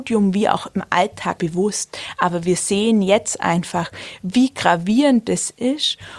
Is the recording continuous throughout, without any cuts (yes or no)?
no